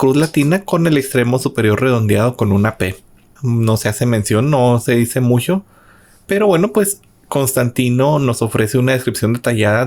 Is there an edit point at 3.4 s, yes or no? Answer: yes